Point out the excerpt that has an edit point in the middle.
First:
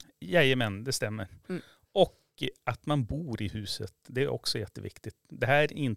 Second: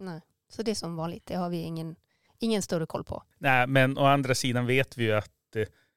second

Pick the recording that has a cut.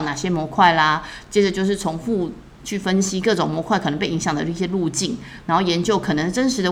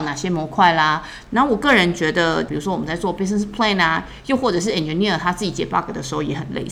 second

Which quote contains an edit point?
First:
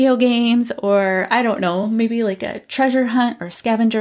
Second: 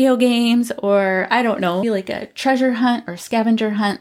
second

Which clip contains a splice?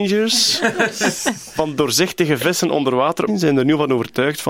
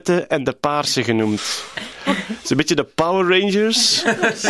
first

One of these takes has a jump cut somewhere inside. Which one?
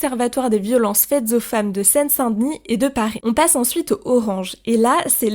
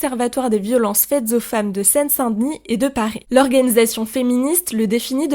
first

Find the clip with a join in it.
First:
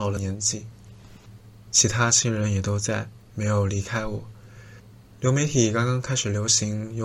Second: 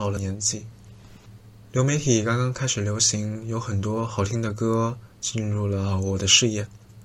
second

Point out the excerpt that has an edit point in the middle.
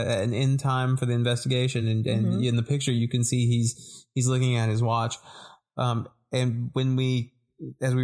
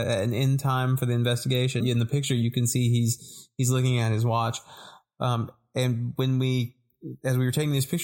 second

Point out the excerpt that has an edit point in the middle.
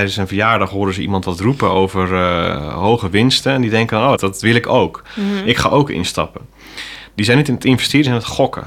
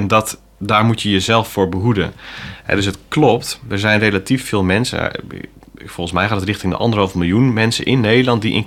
first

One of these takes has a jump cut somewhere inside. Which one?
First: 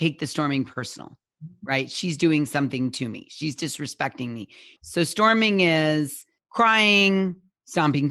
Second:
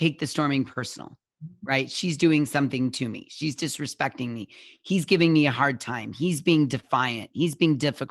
first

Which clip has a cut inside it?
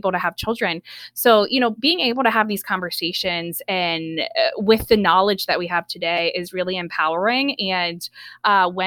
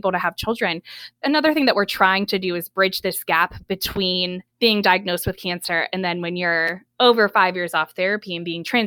second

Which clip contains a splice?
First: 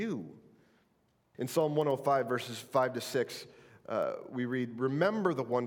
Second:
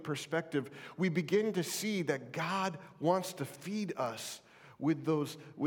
first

